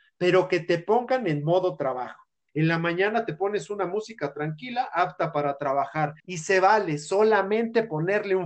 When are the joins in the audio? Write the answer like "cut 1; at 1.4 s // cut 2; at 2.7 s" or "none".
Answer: cut 1; at 2.5 s // cut 2; at 6.2 s